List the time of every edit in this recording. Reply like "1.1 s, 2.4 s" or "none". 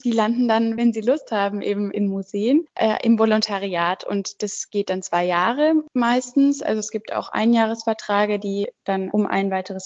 none